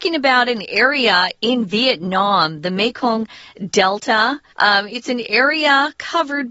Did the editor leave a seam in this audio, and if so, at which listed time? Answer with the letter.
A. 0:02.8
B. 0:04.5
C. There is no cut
B